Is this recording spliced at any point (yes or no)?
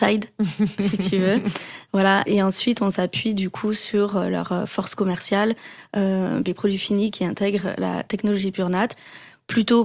yes